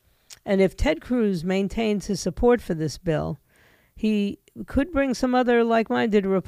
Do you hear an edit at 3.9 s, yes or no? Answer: no